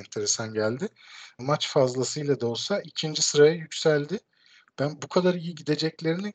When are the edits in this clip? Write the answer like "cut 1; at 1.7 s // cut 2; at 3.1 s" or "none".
cut 1; at 1.4 s